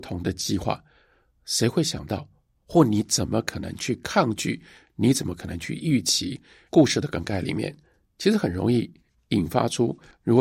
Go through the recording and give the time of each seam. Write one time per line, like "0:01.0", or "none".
0:06.7